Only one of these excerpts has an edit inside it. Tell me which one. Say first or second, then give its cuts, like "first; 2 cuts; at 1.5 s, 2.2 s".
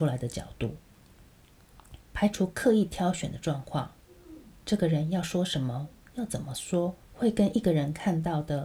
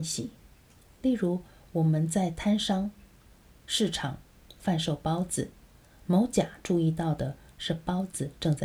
first; 2 cuts; at 2.0 s, 7.0 s